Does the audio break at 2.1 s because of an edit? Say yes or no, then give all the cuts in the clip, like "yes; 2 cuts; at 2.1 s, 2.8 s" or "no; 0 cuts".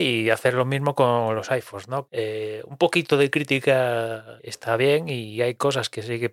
yes; 2 cuts; at 2.1 s, 4.4 s